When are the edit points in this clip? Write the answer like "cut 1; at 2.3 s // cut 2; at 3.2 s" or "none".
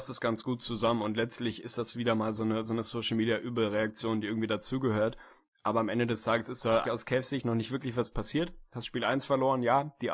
cut 1; at 6.8 s